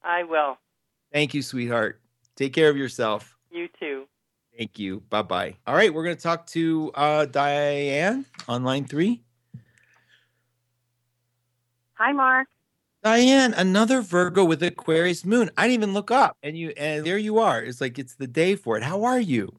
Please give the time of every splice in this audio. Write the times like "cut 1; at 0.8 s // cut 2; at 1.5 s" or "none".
cut 1; at 5.6 s // cut 2; at 17.0 s